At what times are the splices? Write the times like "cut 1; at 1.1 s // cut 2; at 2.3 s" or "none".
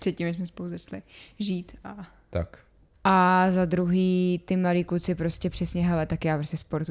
cut 1; at 2.9 s

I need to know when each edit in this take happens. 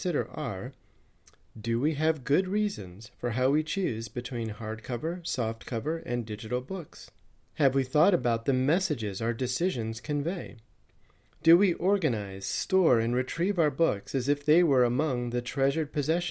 none

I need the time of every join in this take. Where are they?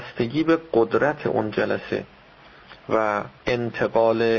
cut 1; at 3.4 s

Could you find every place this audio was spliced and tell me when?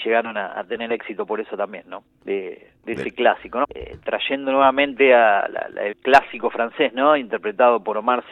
cut 1; at 2.2 s // cut 2; at 3.6 s // cut 3; at 5.9 s

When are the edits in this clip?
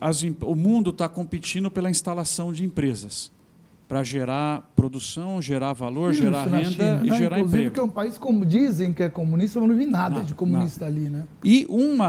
none

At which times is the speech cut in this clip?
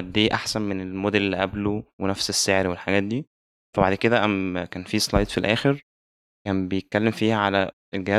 none

